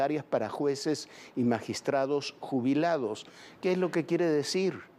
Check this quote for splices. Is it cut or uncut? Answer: uncut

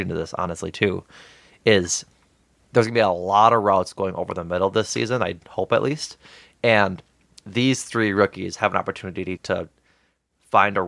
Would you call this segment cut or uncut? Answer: cut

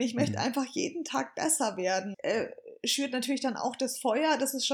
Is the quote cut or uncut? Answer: cut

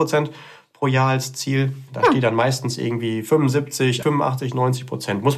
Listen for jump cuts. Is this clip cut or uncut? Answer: cut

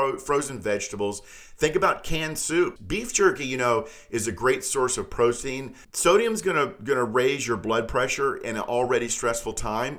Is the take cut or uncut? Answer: cut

